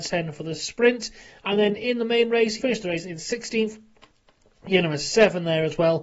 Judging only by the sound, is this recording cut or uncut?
cut